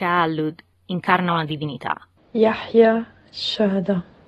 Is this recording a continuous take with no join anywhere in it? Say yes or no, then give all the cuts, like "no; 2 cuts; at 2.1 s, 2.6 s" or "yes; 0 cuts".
no; 1 cut; at 2.2 s